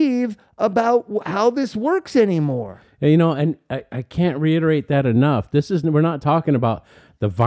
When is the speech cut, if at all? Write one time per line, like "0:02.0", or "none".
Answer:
none